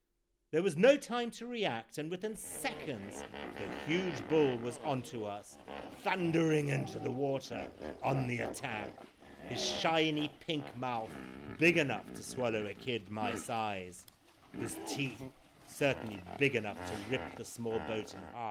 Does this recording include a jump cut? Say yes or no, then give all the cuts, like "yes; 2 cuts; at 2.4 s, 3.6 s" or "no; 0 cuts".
no; 0 cuts